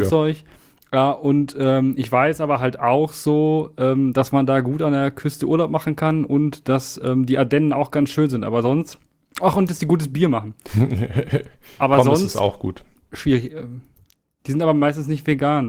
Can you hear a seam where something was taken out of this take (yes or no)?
no